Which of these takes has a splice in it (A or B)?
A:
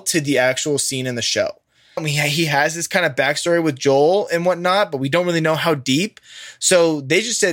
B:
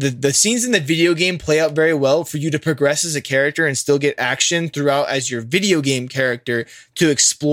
A